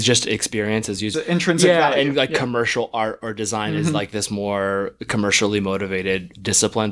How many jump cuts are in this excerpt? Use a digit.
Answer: 1